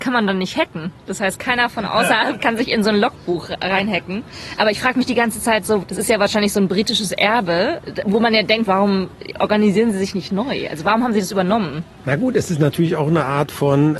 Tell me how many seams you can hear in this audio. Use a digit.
1